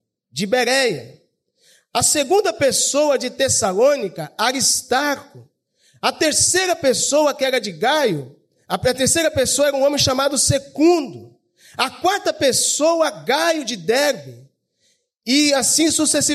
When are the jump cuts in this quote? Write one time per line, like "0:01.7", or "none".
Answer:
none